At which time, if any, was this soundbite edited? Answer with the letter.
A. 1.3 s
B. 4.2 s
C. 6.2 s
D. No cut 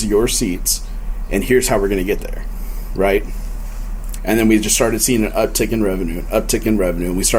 B